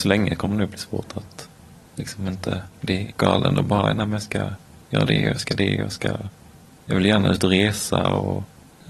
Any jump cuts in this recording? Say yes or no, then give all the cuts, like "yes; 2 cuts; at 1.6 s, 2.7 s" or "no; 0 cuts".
no; 0 cuts